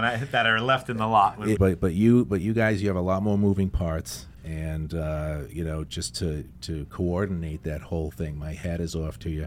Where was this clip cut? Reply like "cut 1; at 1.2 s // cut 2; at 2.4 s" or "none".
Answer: cut 1; at 1.6 s